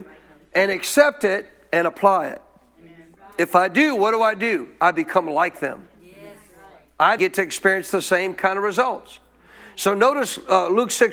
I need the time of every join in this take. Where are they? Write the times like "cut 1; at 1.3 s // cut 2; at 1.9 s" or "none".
cut 1; at 7.2 s